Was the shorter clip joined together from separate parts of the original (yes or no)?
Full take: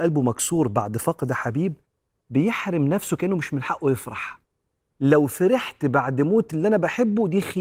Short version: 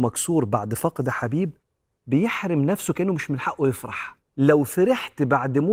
yes